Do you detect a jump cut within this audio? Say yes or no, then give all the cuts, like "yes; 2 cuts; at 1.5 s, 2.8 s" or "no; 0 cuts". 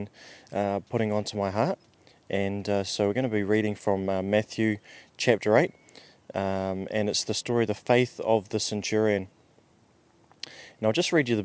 no; 0 cuts